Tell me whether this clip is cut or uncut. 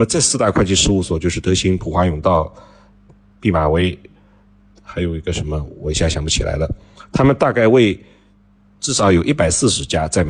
uncut